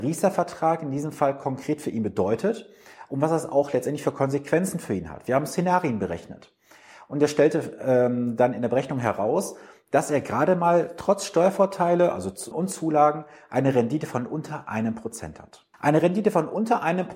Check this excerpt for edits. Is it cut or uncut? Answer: cut